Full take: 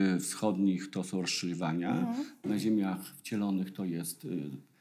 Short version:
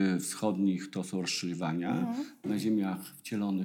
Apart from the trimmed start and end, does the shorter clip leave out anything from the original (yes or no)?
no